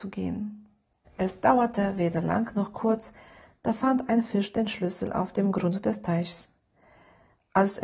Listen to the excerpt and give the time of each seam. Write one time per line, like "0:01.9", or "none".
0:01.0